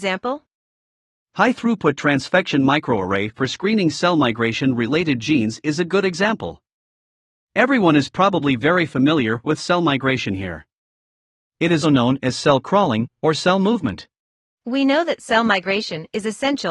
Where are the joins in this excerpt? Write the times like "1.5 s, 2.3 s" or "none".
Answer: 1.2 s, 11.8 s, 14.5 s